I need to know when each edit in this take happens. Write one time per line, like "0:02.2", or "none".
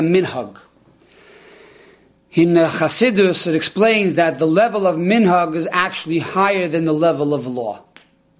none